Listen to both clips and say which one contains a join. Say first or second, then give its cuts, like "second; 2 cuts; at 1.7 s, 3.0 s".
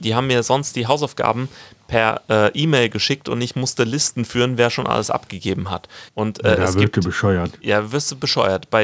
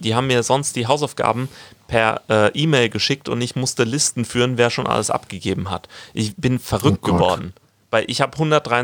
first; 1 cut; at 6.1 s